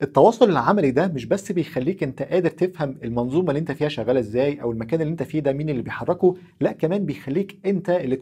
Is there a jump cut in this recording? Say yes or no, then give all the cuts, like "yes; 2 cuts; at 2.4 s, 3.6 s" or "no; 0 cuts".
no; 0 cuts